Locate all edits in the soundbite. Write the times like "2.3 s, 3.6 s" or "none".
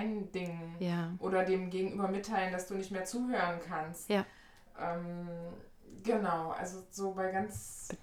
none